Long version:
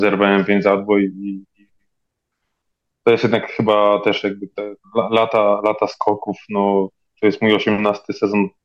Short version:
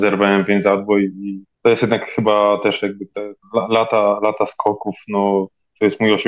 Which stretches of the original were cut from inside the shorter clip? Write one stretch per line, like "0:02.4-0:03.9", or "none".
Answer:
0:01.5-0:02.9